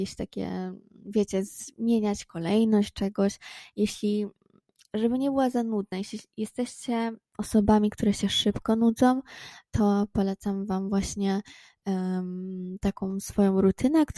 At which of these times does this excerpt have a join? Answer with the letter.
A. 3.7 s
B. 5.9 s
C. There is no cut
C